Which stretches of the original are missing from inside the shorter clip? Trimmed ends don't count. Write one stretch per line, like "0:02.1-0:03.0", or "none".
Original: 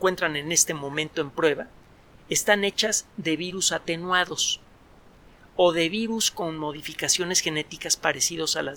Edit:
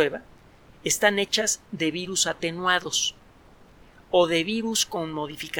none